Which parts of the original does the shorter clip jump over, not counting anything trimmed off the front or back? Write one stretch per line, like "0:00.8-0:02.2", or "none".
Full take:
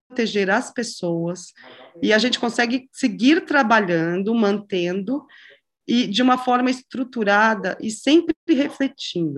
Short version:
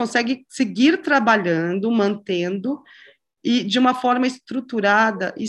none